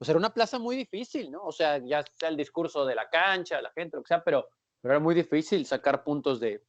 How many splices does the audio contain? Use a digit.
0